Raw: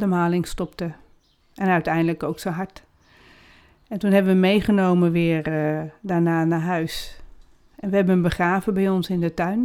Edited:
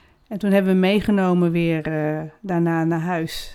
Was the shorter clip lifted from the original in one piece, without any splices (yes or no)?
yes